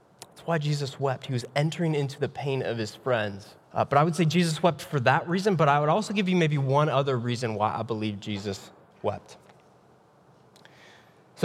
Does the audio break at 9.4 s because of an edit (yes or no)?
no